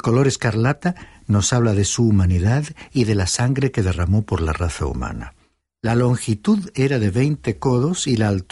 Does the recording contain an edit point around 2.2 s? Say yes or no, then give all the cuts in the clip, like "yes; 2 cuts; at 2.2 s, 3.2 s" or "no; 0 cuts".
no; 1 cut; at 5.6 s